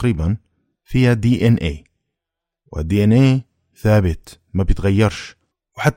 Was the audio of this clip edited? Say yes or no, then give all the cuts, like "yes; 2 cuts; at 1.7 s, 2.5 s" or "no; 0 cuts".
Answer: no; 0 cuts